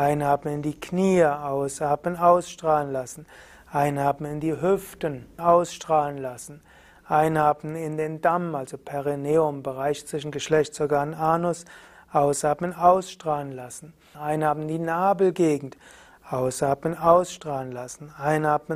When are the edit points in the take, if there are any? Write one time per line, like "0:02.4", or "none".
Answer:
0:05.4
0:14.1